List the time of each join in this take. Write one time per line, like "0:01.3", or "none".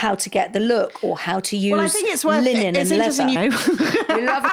0:03.4